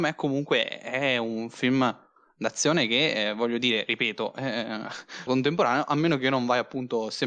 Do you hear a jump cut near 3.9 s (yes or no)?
no